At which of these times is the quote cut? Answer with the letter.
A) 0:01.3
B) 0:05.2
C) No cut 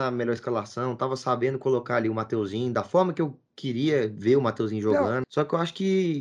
B